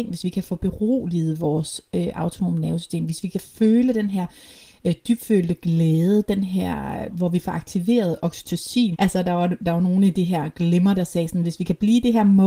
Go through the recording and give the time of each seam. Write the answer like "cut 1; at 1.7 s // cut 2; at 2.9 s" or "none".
cut 1; at 7.1 s // cut 2; at 8.9 s // cut 3; at 11.0 s

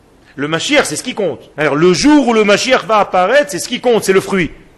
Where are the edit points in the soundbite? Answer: cut 1; at 1.5 s

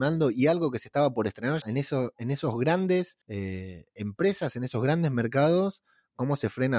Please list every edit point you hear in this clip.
cut 1; at 1.6 s // cut 2; at 3.2 s

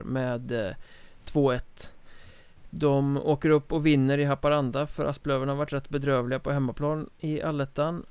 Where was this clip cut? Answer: none

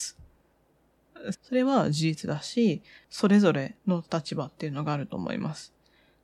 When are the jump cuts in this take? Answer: cut 1; at 1.3 s // cut 2; at 3.0 s

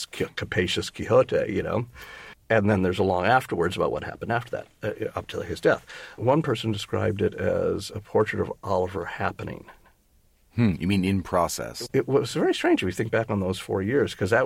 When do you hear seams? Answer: none

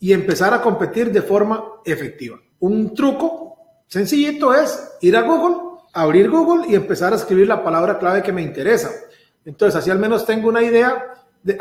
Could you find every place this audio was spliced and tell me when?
cut 1; at 5.9 s // cut 2; at 9.4 s

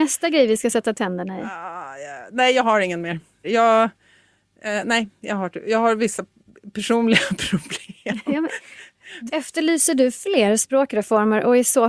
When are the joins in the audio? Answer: cut 1; at 3.4 s // cut 2; at 9.3 s

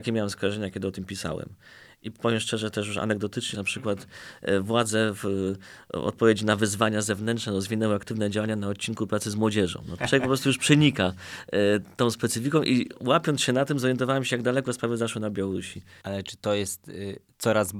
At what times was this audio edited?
cut 1; at 3.5 s // cut 2; at 10.0 s // cut 3; at 16.0 s

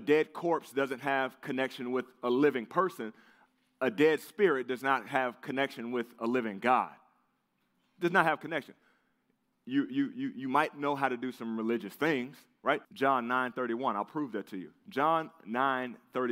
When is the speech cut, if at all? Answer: cut 1; at 12.8 s

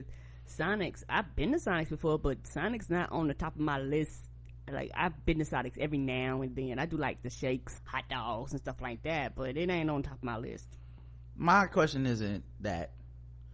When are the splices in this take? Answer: cut 1; at 7.8 s

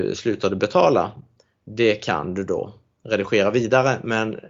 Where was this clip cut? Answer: cut 1; at 3.0 s

